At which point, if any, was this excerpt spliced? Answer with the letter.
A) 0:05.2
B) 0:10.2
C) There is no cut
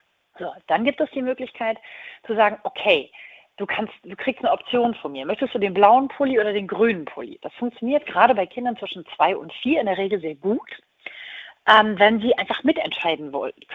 B